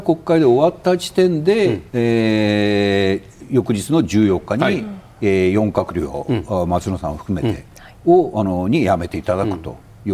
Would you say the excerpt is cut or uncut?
cut